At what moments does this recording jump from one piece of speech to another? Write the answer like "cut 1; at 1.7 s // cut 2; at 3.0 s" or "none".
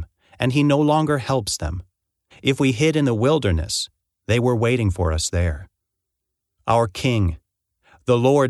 cut 1; at 2.3 s